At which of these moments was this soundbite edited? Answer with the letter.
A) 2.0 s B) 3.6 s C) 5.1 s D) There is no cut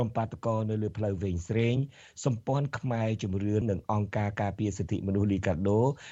B